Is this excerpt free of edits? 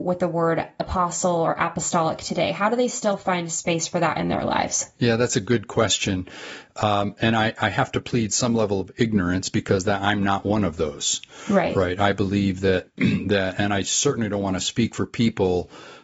yes; 0 cuts

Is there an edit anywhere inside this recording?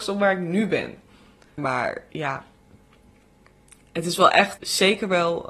yes; 2 cuts; at 1.6 s, 4.6 s

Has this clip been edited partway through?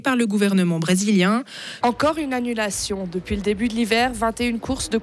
yes; 1 cut; at 1.8 s

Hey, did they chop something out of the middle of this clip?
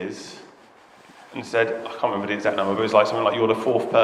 no; 0 cuts

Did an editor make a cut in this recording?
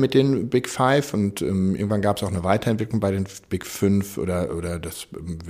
no; 0 cuts

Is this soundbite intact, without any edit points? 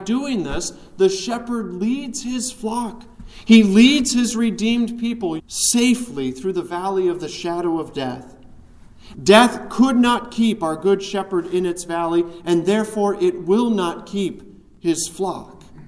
no; 2 cuts; at 5.4 s, 9.1 s

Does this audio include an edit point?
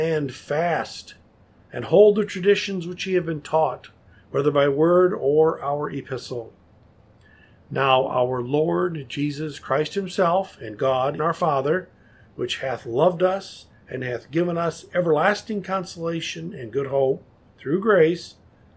yes; 1 cut; at 11.2 s

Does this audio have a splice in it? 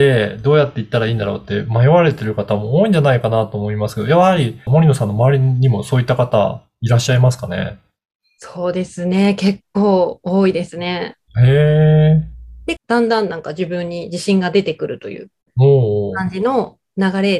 yes; 3 cuts; at 4.7 s, 11.3 s, 12.8 s

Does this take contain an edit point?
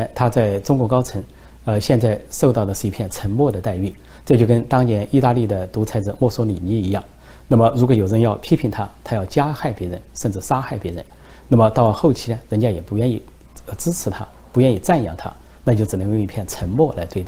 no; 0 cuts

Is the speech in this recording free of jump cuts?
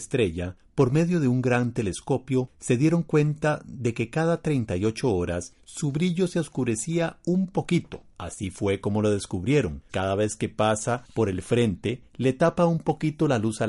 no; 1 cut; at 9.9 s

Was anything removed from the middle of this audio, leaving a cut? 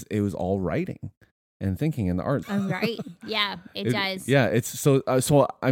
yes; 1 cut; at 2.4 s

